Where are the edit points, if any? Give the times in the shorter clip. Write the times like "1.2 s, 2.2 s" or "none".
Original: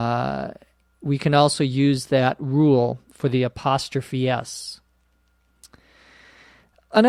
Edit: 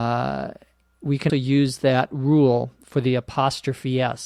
1.3 s

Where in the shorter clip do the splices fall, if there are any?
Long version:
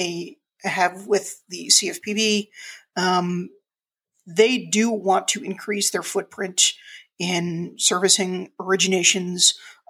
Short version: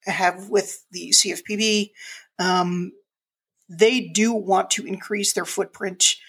none

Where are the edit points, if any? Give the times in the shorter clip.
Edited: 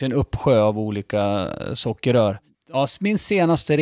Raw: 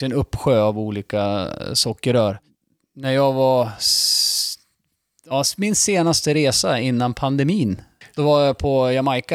2.5 s

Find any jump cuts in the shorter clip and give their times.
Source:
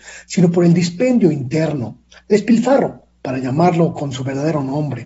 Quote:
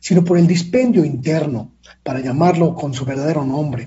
2.0 s

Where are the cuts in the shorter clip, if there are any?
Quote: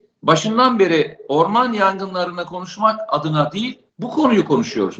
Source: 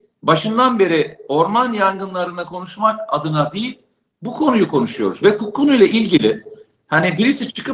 3.9 s

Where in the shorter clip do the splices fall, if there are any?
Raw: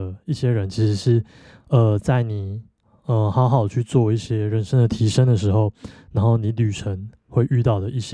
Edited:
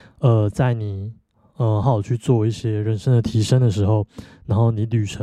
1.8 s

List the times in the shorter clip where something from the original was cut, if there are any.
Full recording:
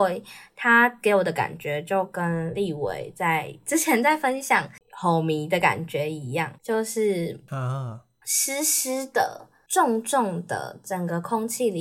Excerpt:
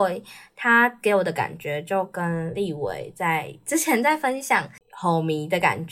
none

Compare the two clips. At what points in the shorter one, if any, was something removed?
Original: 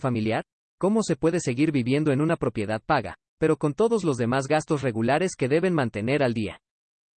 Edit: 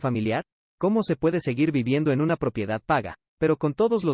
none

